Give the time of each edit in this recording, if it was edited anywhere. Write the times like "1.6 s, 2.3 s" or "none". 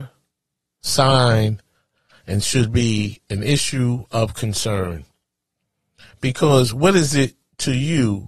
none